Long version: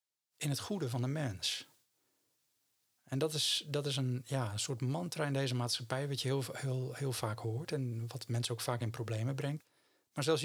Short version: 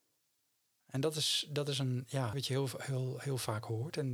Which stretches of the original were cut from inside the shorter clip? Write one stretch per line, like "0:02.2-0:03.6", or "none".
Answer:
0:04.5-0:06.1